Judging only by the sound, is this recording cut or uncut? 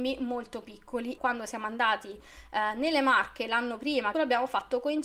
cut